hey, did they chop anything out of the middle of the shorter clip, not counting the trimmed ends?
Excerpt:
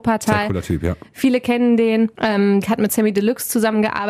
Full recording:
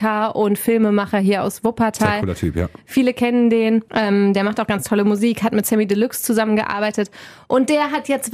yes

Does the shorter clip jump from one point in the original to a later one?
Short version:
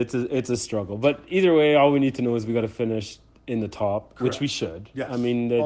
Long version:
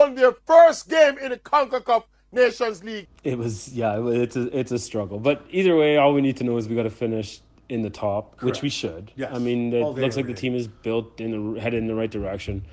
no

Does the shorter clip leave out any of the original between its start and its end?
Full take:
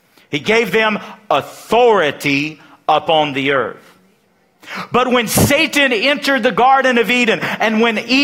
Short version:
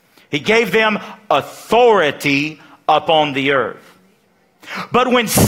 no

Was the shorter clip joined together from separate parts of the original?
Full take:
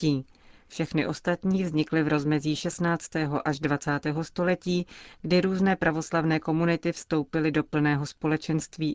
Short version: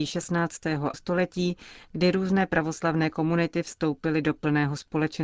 yes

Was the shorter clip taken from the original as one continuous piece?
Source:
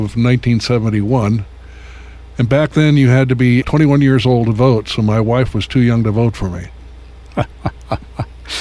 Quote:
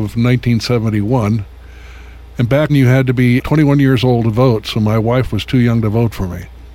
no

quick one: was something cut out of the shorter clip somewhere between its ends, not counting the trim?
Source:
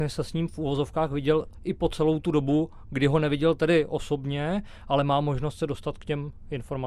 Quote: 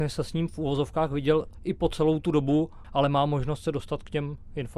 yes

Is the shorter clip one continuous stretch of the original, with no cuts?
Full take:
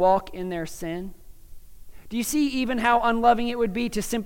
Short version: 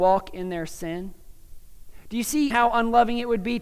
no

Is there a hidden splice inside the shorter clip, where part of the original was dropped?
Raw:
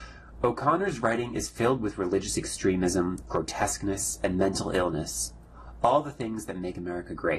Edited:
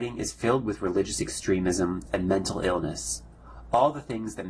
yes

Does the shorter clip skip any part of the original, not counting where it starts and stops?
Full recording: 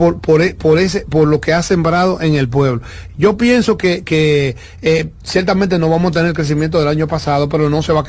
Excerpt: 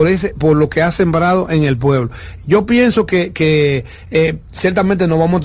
no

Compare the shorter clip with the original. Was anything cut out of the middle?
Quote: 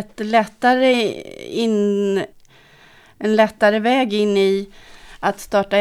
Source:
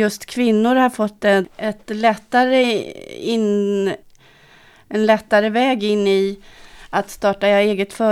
no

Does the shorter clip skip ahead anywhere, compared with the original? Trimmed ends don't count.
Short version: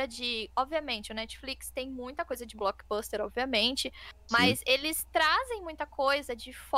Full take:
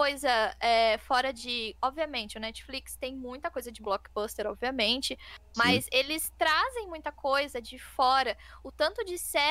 no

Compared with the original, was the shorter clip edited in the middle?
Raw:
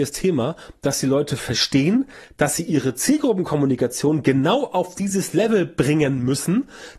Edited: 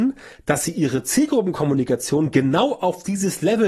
no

